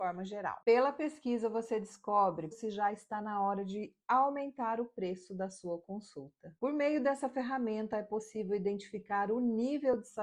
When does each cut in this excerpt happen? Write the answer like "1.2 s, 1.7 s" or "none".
2.5 s, 6.6 s